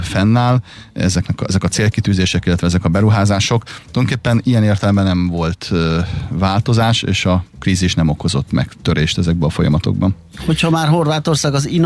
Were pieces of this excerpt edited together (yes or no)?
no